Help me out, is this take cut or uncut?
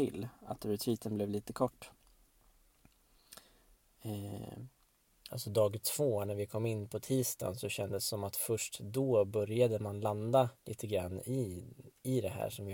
cut